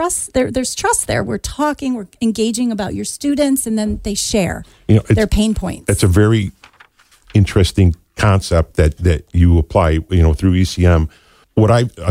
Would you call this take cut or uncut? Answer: uncut